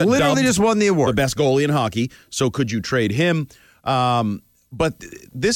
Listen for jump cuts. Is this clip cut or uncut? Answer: uncut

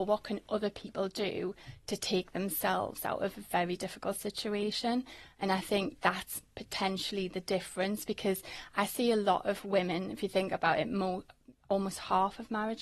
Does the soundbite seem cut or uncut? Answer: uncut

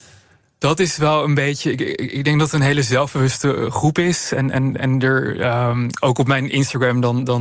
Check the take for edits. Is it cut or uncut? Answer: uncut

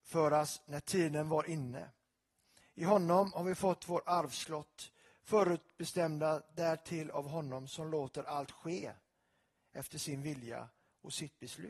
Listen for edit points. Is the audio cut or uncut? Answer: cut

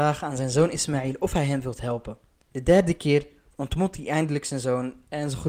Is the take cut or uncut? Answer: cut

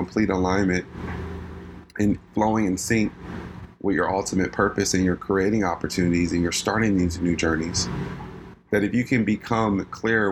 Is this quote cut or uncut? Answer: cut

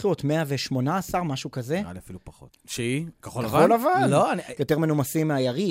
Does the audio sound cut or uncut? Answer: cut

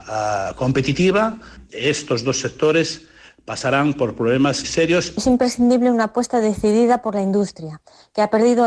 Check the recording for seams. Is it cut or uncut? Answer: cut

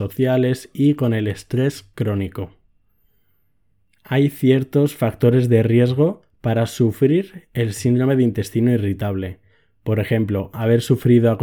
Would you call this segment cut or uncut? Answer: uncut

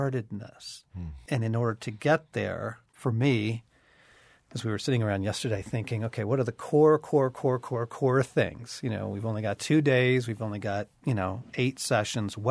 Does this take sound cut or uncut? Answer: cut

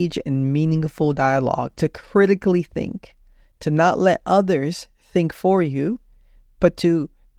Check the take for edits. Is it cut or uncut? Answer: uncut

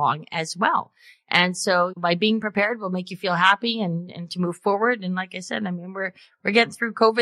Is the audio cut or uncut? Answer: uncut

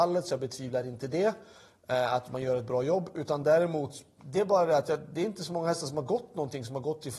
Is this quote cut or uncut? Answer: uncut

